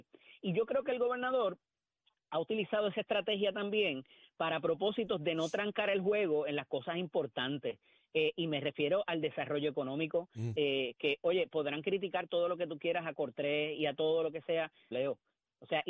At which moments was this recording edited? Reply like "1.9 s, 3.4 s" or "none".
10.5 s, 14.9 s